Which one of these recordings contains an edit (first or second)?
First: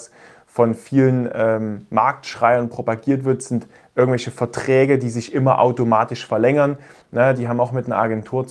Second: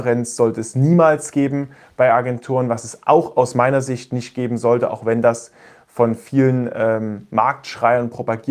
first